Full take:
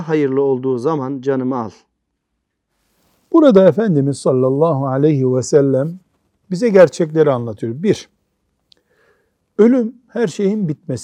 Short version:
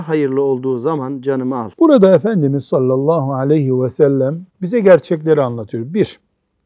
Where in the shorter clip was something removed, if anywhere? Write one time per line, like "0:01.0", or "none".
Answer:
0:01.7
0:04.5